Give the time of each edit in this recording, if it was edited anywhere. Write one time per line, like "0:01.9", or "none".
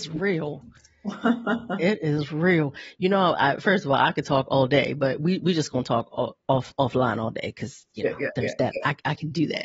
none